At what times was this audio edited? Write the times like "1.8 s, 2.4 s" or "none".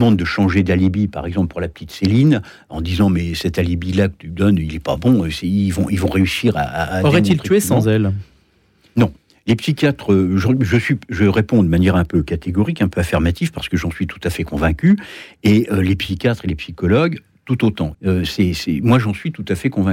17.9 s